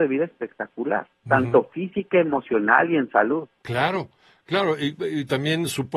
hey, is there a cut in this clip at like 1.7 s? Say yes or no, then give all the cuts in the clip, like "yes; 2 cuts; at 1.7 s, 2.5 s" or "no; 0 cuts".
no; 0 cuts